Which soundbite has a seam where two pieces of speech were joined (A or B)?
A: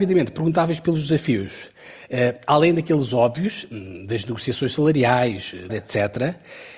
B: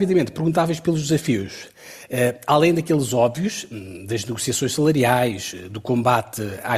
A